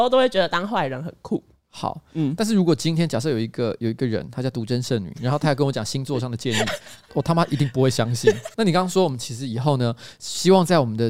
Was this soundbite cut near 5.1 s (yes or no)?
no